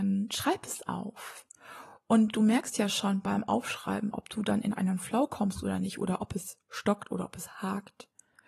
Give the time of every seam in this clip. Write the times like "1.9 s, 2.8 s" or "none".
none